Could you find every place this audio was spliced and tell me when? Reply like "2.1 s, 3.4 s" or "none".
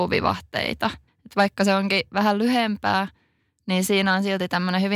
1.1 s